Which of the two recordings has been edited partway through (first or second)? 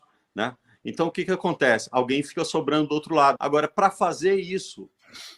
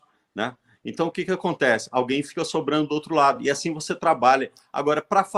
first